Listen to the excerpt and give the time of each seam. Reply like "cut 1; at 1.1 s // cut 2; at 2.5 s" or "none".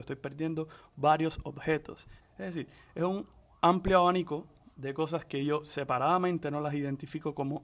cut 1; at 2.2 s